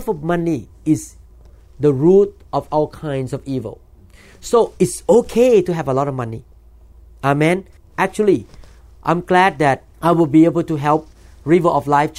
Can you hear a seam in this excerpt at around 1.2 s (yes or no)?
no